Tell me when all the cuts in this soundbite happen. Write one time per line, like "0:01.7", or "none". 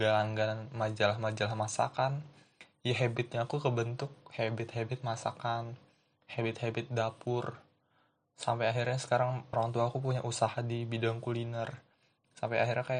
0:09.5